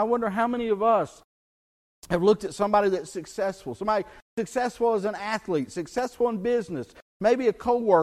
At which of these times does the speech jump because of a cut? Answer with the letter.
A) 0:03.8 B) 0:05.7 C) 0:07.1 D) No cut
D